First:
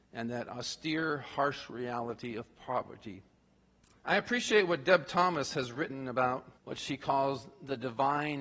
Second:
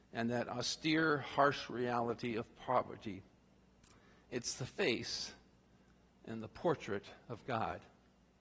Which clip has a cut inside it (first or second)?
first